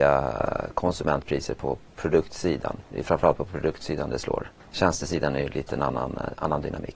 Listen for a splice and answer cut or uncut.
cut